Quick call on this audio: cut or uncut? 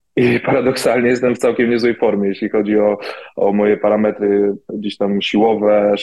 uncut